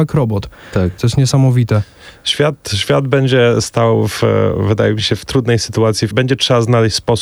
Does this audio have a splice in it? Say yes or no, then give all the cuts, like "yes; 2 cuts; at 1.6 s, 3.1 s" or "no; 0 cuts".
yes; 2 cuts; at 1.0 s, 6.1 s